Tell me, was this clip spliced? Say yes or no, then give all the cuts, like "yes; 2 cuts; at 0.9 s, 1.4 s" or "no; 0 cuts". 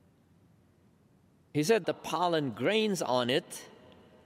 yes; 1 cut; at 1.8 s